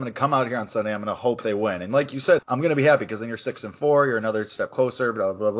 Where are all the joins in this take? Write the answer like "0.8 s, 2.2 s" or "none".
2.4 s